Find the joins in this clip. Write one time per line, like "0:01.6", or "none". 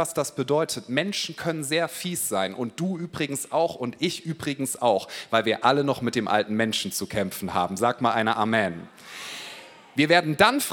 none

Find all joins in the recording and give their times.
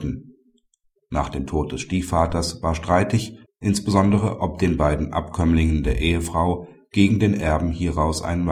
0:01.0
0:03.4

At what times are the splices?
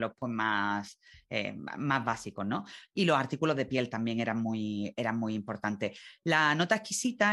none

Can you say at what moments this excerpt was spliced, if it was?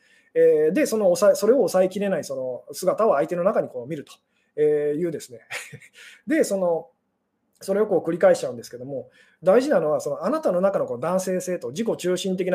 none

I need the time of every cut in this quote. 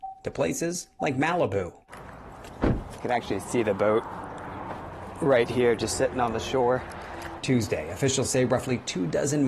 0:07.4

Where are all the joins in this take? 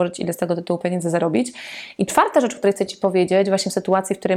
0:02.0

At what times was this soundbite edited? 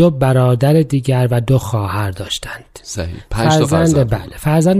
none

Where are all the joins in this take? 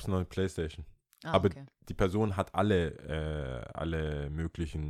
none

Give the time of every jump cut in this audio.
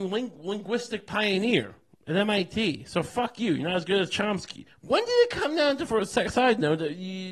none

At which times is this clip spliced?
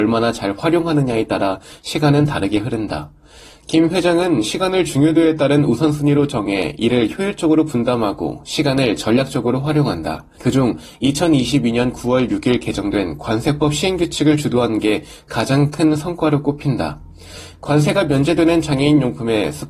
0:10.4

